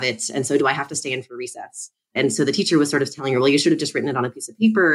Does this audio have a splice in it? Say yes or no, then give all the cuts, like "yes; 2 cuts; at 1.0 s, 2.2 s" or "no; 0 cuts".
no; 0 cuts